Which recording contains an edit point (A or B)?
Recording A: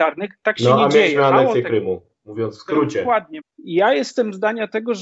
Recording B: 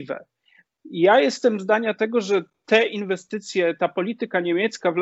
A